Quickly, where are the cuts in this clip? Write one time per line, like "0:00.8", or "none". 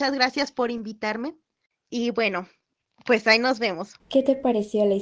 0:04.0